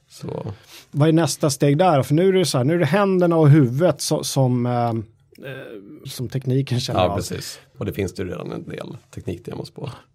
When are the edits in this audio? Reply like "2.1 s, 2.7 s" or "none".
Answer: 6.0 s, 7.7 s